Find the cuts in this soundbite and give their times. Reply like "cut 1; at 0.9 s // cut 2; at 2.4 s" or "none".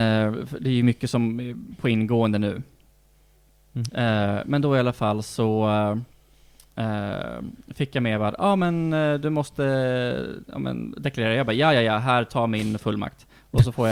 cut 1; at 3.9 s

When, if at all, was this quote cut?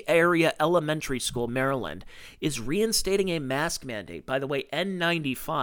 cut 1; at 1.5 s

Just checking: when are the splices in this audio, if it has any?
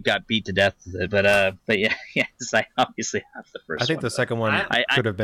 cut 1; at 1.6 s

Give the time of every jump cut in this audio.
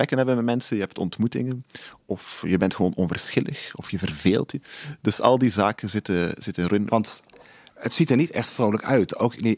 cut 1; at 6.9 s

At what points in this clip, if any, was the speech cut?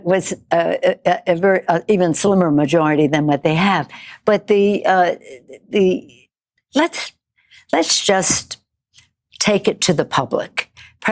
none

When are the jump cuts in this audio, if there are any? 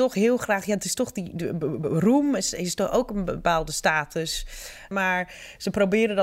cut 1; at 4.9 s

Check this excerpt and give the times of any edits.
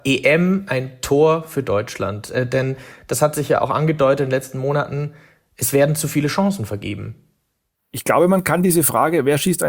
none

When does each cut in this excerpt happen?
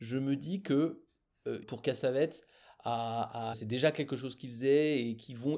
cut 1; at 1.6 s // cut 2; at 3.5 s

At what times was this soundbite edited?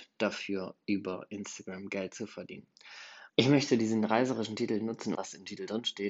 cut 1; at 3.3 s // cut 2; at 5.1 s

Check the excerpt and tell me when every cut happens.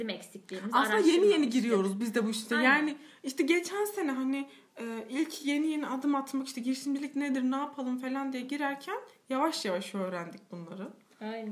none

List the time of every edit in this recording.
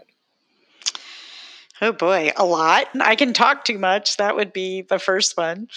cut 1; at 2.9 s

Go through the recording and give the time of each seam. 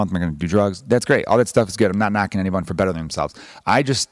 none

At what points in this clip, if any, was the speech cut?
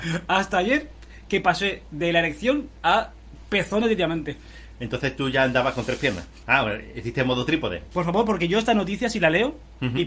cut 1; at 6.4 s

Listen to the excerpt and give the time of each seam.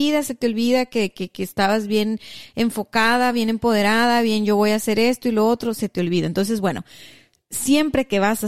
none

